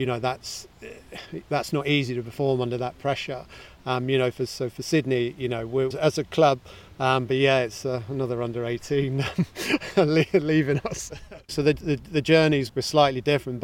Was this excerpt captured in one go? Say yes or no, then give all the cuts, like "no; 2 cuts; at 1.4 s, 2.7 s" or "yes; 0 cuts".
no; 3 cuts; at 5.9 s, 11.5 s, 12.7 s